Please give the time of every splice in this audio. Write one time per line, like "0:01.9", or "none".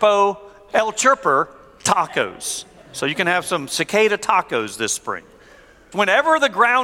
0:05.9